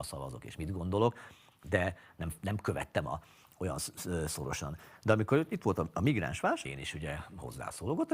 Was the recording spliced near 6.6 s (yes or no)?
yes